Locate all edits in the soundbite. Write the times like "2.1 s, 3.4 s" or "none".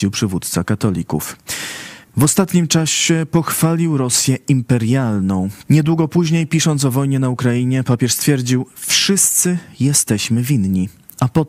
2.0 s, 5.7 s